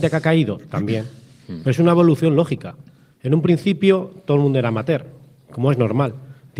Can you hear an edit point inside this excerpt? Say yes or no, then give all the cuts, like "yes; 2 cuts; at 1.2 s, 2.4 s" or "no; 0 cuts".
no; 0 cuts